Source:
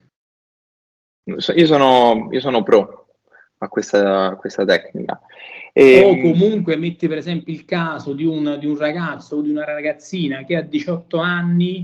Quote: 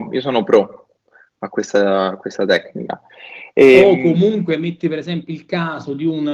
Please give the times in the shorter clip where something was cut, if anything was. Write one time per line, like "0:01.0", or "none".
none